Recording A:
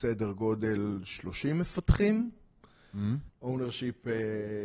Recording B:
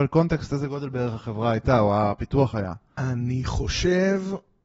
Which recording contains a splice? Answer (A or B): A